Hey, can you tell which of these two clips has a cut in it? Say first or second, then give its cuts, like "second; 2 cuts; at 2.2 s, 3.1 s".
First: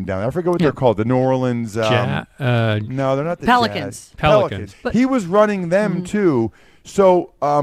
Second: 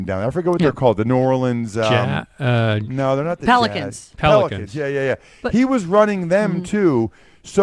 first; 1 cut; at 4.7 s